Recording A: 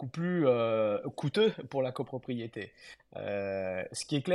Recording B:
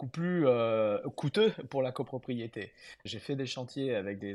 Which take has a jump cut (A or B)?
B